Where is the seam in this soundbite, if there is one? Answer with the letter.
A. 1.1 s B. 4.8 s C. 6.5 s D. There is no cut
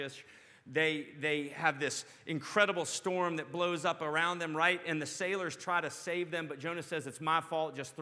D